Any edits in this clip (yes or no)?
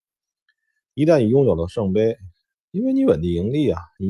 yes